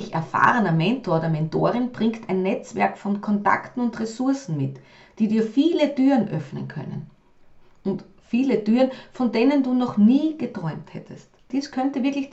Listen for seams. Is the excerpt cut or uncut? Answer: cut